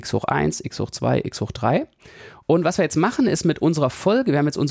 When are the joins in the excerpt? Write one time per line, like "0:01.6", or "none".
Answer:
0:02.4